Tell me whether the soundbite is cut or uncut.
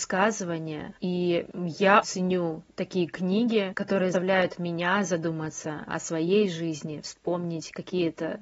cut